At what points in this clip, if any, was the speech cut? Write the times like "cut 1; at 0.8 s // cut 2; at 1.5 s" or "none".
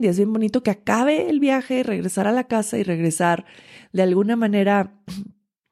none